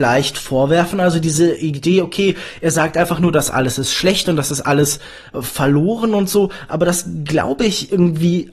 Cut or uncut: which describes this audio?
uncut